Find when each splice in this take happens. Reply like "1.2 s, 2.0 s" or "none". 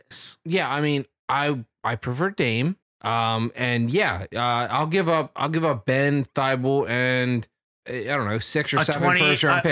2.8 s, 7.8 s